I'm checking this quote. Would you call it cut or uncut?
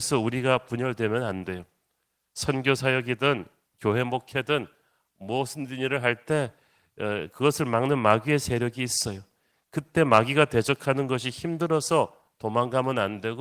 uncut